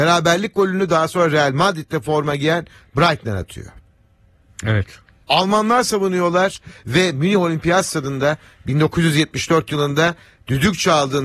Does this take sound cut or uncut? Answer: cut